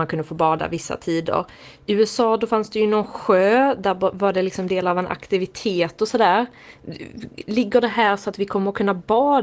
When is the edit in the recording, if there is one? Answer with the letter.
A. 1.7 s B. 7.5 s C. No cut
C